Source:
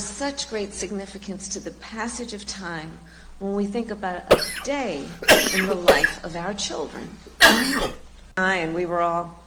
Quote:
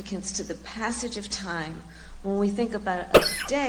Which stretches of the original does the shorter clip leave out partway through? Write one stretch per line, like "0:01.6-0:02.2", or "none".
none